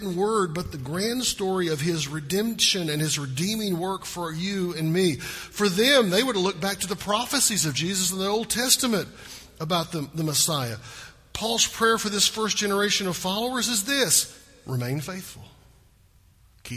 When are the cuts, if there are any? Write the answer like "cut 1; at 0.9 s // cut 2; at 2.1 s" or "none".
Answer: none